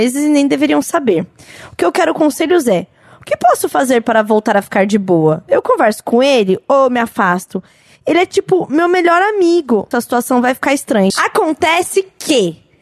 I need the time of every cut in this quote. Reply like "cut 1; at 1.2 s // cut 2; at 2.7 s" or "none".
cut 1; at 9.9 s // cut 2; at 11.1 s